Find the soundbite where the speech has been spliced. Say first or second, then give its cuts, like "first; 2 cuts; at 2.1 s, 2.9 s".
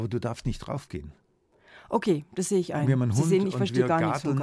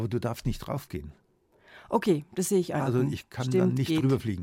second; 1 cut; at 2.8 s